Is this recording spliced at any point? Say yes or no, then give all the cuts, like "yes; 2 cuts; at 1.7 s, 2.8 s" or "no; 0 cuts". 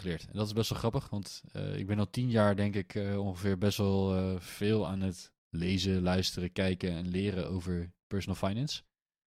no; 0 cuts